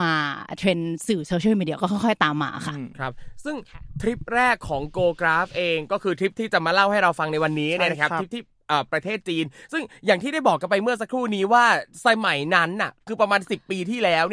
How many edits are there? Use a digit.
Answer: 1